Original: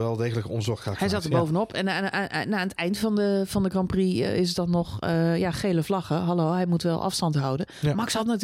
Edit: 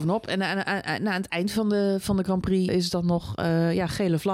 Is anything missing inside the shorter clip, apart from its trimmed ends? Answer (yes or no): yes